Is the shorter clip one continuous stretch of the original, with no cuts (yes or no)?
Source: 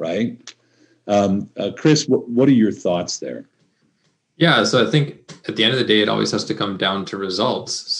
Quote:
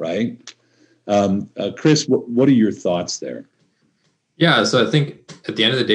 yes